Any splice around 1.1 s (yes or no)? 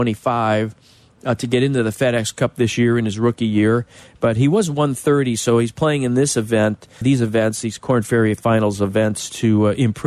no